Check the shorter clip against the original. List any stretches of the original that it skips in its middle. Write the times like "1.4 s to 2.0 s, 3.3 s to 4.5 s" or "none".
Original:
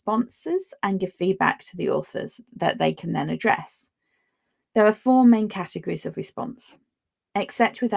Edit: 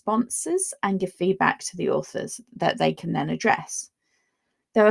none